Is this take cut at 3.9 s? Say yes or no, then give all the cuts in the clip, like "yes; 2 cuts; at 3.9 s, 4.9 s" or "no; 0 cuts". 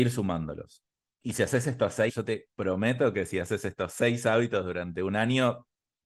no; 1 cut; at 2.1 s